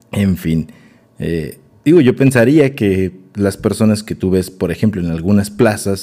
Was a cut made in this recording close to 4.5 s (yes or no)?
no